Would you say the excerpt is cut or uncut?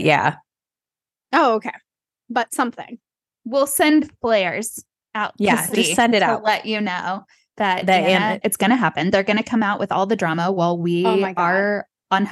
cut